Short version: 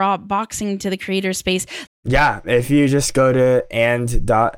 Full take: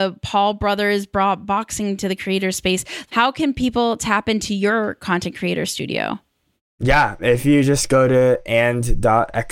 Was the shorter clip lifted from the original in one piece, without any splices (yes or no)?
no